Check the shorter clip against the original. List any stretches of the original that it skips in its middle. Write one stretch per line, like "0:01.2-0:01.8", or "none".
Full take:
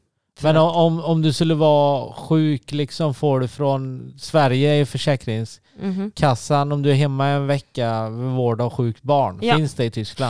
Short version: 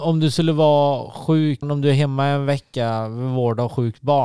0:02.6-0:06.6

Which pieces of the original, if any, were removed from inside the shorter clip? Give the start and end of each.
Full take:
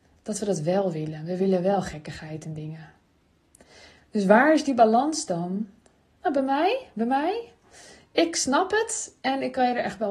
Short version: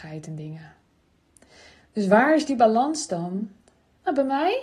none

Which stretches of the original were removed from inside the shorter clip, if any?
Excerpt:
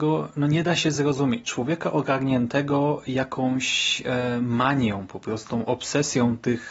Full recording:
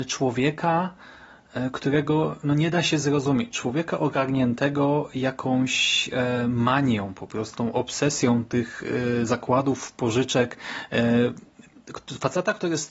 none

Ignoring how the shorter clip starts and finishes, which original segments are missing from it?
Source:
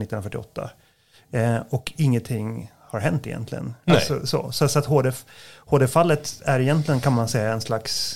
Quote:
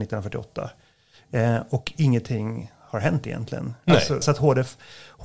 0:04.2-0:04.7

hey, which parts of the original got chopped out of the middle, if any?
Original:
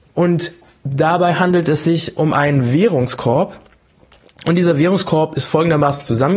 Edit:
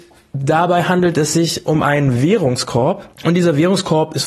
0:03.6-0:04.3

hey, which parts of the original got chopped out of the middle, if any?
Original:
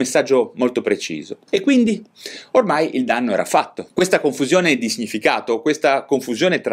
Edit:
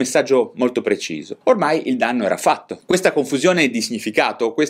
0:01.4-0:02.5

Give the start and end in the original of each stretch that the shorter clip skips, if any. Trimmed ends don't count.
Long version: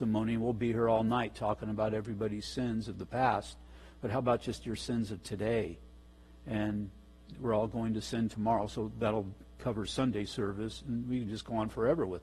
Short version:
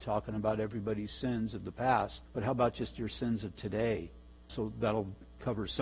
0:03.6-0:03.9
0:06.2-0:08.7

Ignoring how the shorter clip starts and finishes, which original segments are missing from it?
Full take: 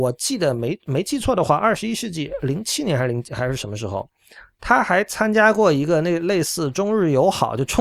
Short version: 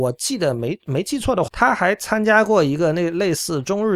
0:01.5-0:04.6

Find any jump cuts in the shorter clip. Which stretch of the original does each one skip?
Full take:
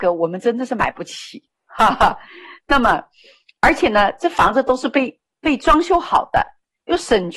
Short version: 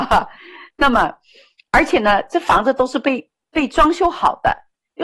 none

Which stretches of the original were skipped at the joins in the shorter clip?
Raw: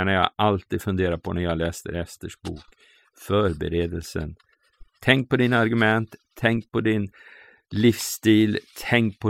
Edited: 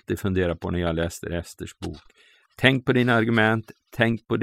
0:03.1-0:04.9

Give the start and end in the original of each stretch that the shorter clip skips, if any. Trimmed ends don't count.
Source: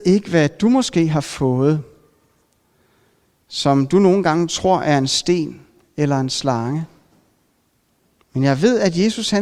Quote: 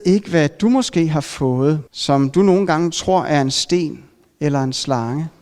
0:01.9-0:03.4

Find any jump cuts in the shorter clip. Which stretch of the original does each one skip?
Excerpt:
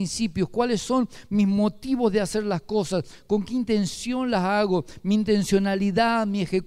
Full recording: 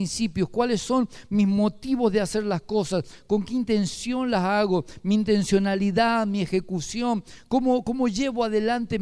none

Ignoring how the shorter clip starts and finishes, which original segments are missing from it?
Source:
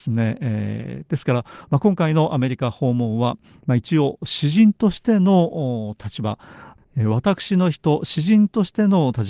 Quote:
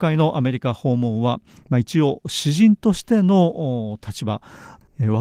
none

